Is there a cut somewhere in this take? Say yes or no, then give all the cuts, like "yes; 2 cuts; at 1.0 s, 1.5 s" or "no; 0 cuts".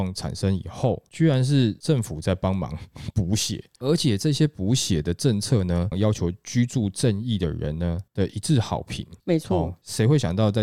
yes; 2 cuts; at 5.9 s, 9.2 s